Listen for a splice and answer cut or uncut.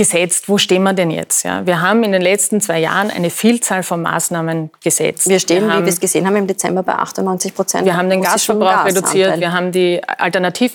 uncut